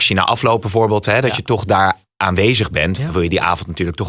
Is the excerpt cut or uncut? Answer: cut